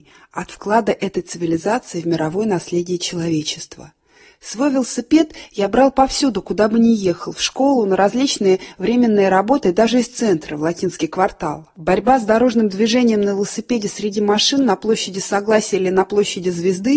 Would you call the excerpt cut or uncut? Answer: uncut